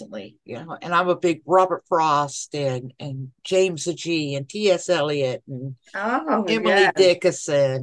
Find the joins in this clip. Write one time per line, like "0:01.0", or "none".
none